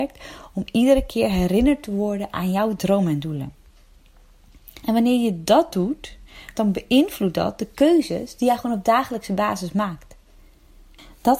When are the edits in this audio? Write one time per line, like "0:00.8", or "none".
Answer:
0:06.5